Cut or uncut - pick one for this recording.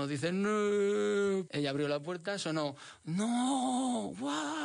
cut